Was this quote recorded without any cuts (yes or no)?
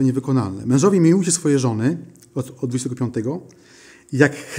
yes